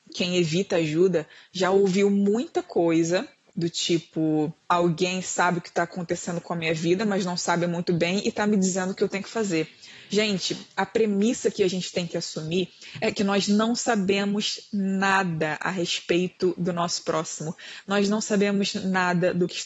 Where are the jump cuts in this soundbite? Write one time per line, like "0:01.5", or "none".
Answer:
0:04.6